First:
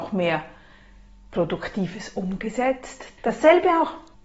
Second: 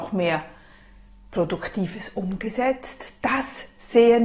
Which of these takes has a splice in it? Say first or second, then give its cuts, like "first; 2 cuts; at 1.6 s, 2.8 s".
first; 1 cut; at 3.2 s